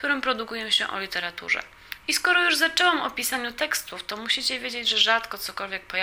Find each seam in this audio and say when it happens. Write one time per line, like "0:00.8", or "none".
0:02.0